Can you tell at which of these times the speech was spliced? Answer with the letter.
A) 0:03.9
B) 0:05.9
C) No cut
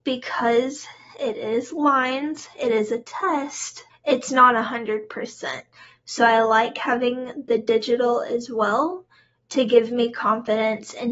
A